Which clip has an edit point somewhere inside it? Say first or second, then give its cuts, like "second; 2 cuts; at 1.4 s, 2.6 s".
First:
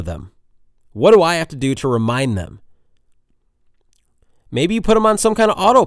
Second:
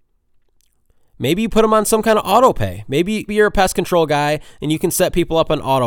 second; 1 cut; at 3.3 s